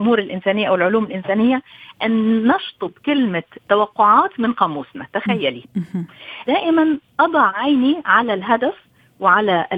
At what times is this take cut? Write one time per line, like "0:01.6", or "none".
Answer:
0:06.4